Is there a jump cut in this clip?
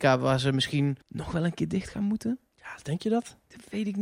yes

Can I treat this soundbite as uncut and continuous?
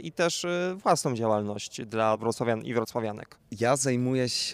yes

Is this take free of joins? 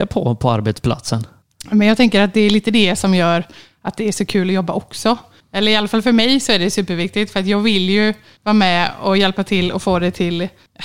yes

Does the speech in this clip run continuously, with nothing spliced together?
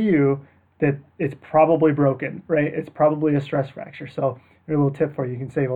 yes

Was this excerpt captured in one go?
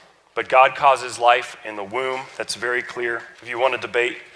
no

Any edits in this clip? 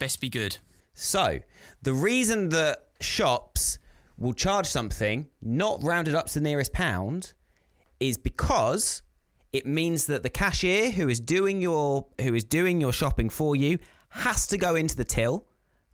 yes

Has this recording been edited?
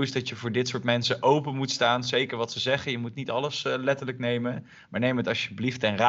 no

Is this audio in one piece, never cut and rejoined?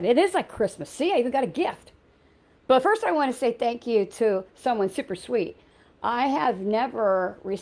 yes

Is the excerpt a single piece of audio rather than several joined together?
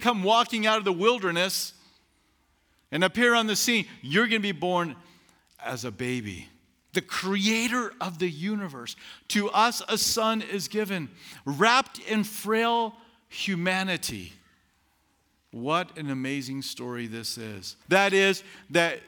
no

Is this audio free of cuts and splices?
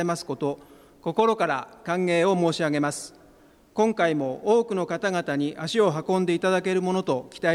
yes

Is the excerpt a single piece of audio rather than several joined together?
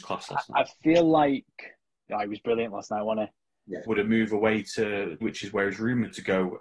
no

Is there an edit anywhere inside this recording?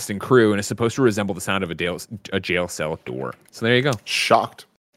no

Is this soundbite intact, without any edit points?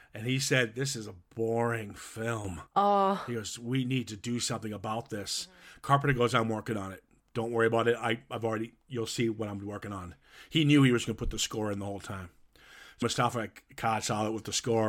no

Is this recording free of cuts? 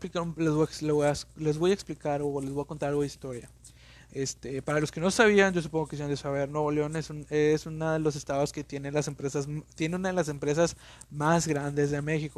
yes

